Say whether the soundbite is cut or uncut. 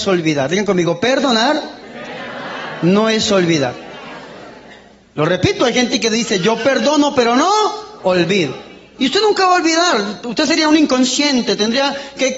uncut